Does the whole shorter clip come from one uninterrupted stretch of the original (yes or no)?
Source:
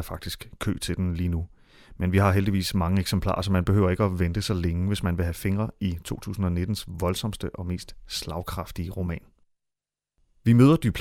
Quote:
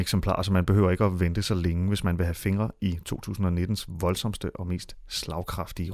yes